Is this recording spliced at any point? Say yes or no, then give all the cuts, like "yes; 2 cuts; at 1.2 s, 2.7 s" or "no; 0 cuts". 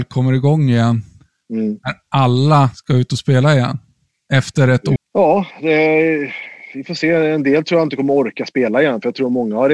yes; 1 cut; at 5.0 s